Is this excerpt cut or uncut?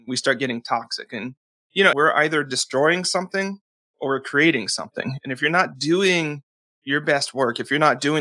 cut